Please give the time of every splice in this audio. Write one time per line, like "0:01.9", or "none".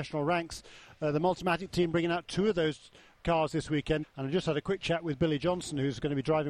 0:04.0

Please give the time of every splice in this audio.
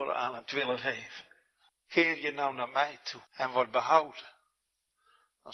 0:01.7
0:03.3

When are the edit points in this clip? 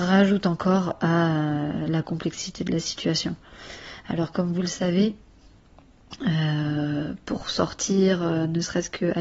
none

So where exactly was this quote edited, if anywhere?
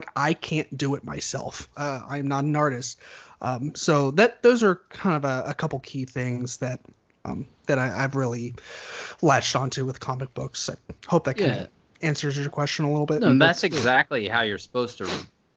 0:01.7

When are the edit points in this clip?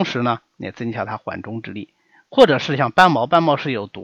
none

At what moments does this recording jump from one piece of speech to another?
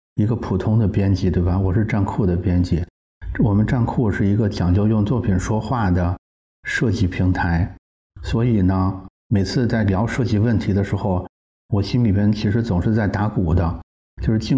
0:09.2

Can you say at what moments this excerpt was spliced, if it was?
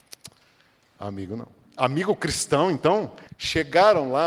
0:03.3

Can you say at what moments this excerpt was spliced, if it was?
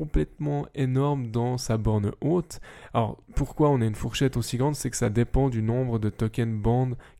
0:03.3

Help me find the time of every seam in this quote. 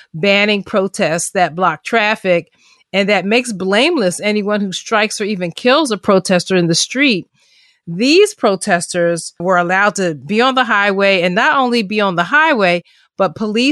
none

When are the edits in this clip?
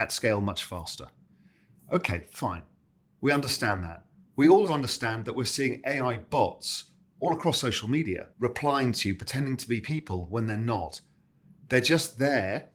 0:04.7
0:08.3

